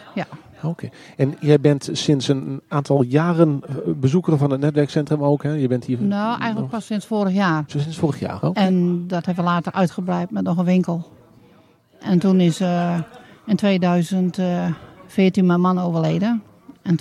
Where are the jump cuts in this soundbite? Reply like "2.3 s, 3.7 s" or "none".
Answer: 6.9 s, 8.4 s